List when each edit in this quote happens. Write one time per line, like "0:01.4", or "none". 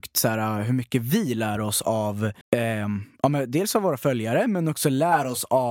0:02.4